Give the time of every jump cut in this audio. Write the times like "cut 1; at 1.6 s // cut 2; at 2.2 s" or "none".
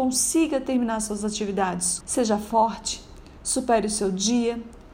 cut 1; at 2.0 s

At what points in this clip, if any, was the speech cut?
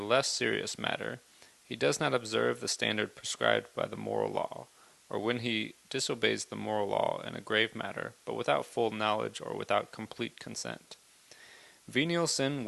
none

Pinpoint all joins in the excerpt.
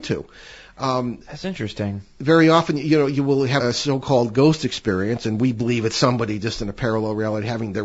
cut 1; at 3.6 s

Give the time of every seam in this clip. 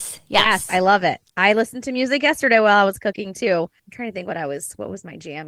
cut 1; at 3.8 s

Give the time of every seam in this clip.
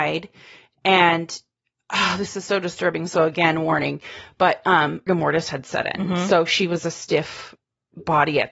cut 1; at 5.1 s

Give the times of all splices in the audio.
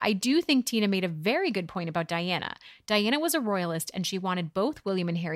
none

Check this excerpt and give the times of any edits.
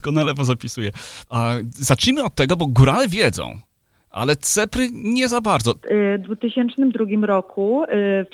cut 1; at 1.3 s // cut 2; at 5.8 s

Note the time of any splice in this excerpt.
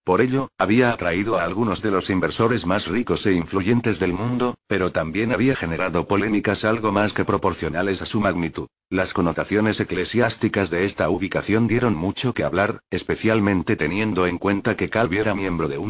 cut 1; at 8.8 s

